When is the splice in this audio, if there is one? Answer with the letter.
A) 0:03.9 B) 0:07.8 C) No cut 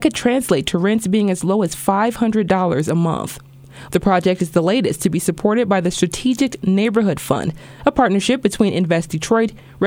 A